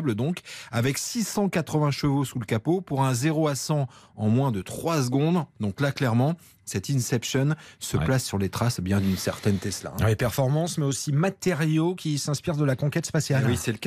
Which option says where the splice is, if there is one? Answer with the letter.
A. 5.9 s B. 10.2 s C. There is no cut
C